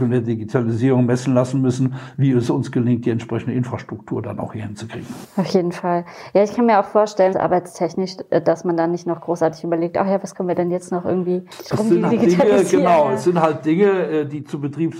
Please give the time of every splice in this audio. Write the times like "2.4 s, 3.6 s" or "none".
7.3 s, 12.1 s